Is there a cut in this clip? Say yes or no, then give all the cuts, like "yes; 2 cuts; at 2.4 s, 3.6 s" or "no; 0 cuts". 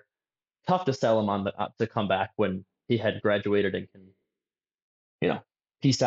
no; 0 cuts